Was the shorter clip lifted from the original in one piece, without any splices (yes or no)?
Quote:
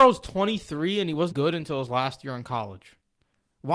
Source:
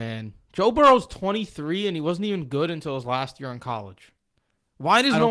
no